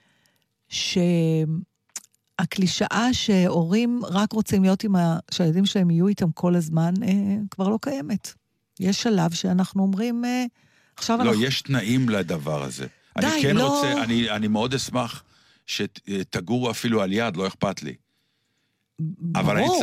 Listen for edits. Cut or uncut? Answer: uncut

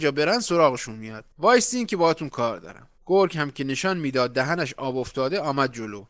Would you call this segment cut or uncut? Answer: cut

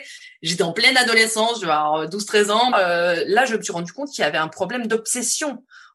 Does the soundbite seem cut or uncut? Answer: cut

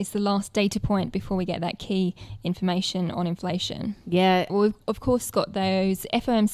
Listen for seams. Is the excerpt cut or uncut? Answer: cut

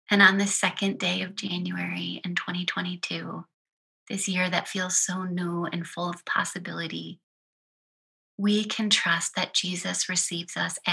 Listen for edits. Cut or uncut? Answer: uncut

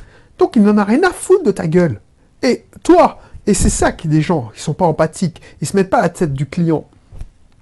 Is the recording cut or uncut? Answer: uncut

